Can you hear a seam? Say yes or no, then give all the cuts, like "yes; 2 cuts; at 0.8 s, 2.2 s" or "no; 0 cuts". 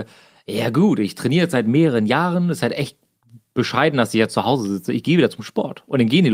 no; 0 cuts